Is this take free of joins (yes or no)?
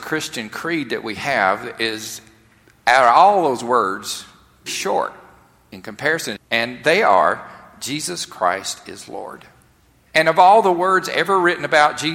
no